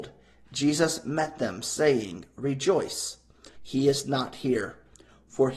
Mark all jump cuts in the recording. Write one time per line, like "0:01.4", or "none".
0:03.5